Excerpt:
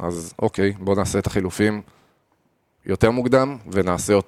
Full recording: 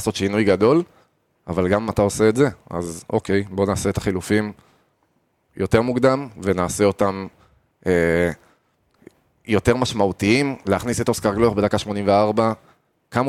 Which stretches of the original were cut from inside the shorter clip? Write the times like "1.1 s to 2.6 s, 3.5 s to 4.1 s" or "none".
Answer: none